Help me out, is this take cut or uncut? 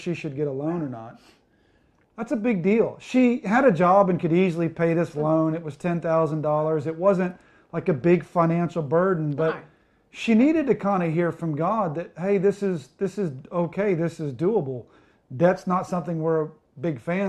uncut